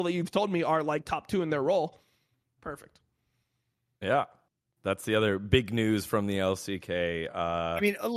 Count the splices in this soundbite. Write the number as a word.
one